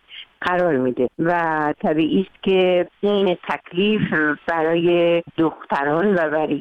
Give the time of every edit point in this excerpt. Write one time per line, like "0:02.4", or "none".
0:01.1